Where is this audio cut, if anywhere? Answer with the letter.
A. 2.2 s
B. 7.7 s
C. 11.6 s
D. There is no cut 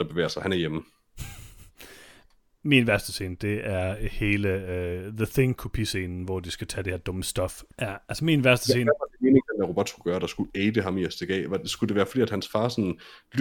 B